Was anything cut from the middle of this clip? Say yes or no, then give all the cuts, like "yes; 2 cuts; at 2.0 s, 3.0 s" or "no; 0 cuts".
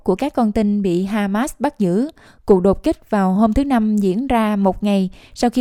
no; 0 cuts